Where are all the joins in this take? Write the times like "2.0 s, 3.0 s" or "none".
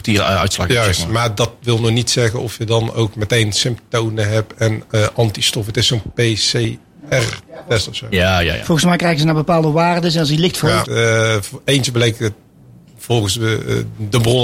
10.8 s